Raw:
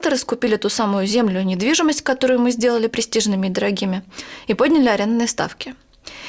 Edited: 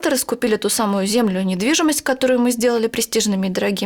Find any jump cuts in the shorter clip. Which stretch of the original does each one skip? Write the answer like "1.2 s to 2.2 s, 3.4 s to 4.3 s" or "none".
none